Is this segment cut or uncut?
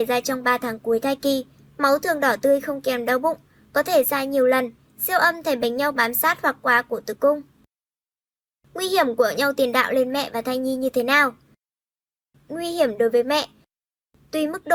uncut